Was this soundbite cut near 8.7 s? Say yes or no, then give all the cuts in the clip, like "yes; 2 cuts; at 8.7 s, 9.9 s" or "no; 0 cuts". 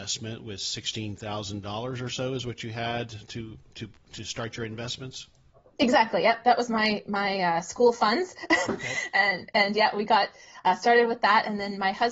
yes; 1 cut; at 8.7 s